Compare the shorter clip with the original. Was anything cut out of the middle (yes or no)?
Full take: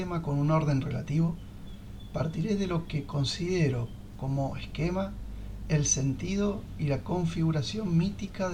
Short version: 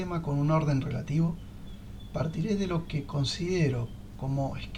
no